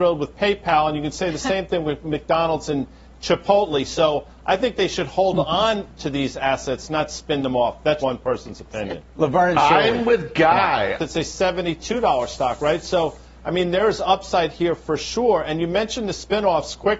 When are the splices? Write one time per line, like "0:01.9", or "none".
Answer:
0:08.0
0:09.0
0:11.0